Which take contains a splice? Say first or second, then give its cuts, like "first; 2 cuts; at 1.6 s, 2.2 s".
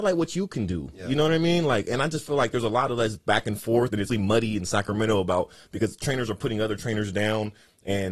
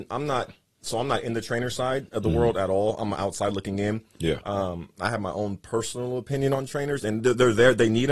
first; 1 cut; at 4.1 s